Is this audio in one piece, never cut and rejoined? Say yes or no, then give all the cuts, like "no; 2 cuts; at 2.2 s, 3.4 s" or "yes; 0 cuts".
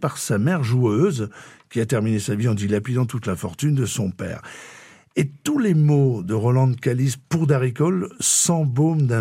yes; 0 cuts